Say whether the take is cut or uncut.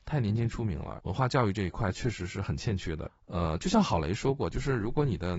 cut